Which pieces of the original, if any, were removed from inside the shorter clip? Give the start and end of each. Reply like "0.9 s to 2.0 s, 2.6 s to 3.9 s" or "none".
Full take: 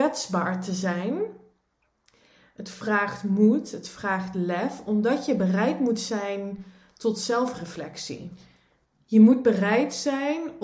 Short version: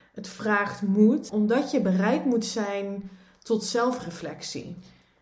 3.7 s to 4.8 s